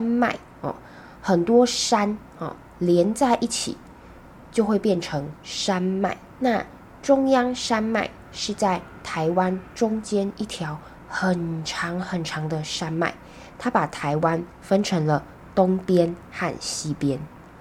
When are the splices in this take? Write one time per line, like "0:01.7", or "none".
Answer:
0:06.3